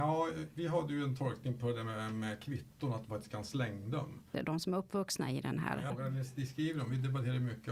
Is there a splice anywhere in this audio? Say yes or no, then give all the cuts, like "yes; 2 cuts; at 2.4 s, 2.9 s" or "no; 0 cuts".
yes; 2 cuts; at 4.3 s, 5.9 s